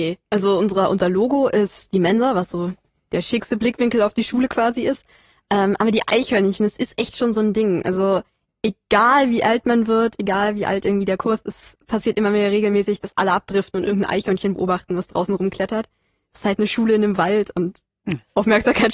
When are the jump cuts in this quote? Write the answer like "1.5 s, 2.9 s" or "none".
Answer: 11.4 s